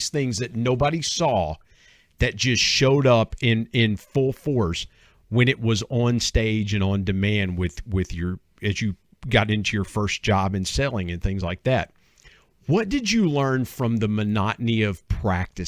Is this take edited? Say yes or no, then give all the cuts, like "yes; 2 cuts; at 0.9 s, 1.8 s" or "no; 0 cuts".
no; 0 cuts